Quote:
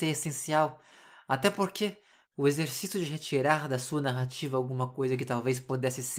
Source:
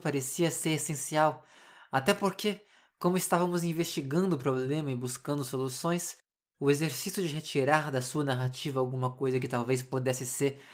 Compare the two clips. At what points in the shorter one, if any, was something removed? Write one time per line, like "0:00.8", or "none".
0:02.2